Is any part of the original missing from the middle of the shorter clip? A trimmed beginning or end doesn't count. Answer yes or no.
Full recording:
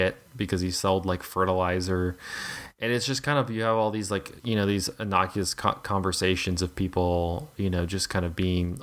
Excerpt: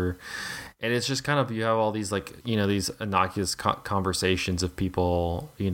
no